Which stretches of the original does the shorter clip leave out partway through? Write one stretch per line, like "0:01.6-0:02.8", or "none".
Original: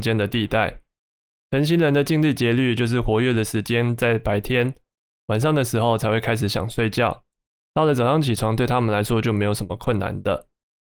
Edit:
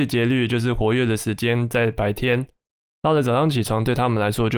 0:05.1-0:07.5

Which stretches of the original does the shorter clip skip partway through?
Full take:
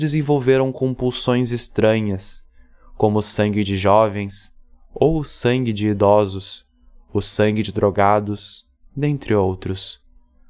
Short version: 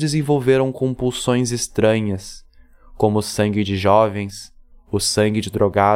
0:04.7-0:06.9

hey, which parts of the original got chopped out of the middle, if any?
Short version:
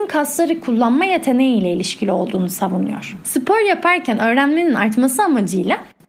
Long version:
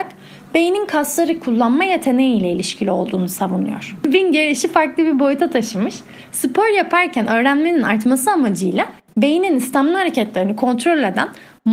0:04.0-0:06.3

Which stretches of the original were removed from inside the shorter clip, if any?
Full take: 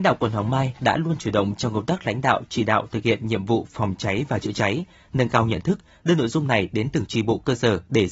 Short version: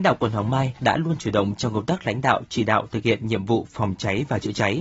none

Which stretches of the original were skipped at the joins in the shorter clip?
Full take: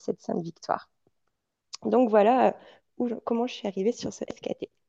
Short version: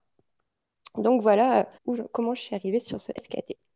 0:02.6-0:02.9

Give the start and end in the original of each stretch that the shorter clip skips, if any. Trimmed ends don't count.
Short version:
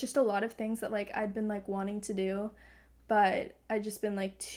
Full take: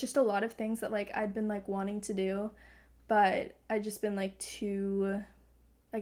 none

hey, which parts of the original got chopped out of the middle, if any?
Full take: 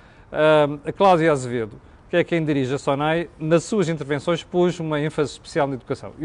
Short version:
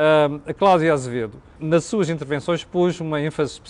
0:01.9-0:03.4

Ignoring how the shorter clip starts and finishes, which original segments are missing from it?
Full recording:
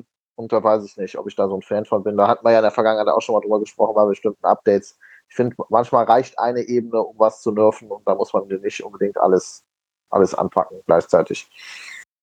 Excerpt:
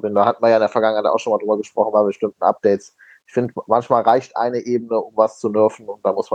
none

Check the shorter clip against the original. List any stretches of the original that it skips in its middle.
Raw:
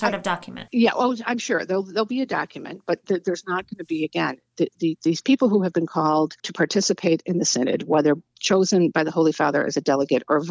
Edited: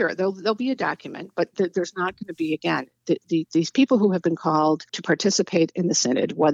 none

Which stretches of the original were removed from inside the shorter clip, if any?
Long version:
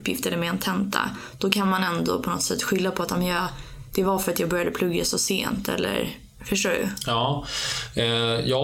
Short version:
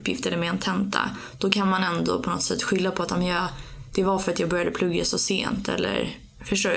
none

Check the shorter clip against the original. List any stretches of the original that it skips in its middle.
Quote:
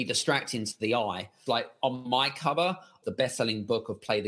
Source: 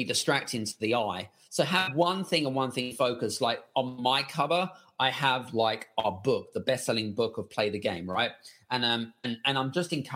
0:01.5-0:03.4
0:05.0-0:06.5

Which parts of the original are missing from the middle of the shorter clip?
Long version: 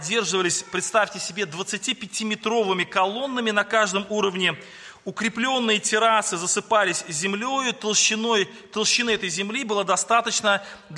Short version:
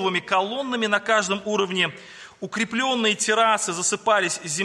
none

